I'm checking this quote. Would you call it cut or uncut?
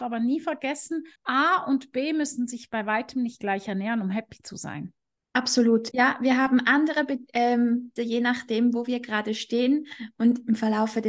cut